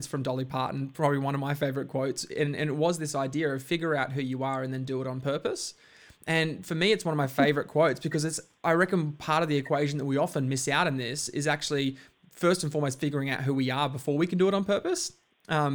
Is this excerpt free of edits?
yes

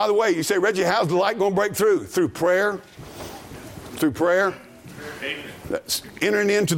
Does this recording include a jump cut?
no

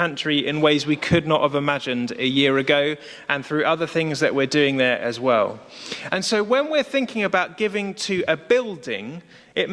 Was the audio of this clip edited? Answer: no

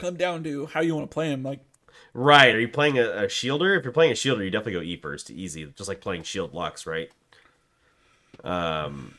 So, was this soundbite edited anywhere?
no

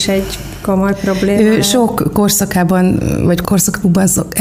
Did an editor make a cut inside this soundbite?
yes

